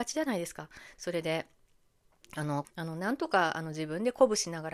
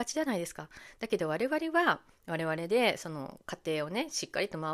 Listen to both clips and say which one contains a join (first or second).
first